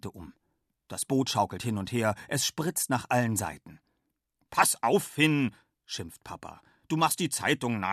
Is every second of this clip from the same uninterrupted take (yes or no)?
yes